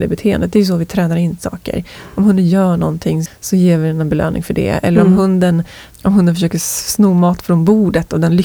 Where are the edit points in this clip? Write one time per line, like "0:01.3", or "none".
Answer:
0:03.3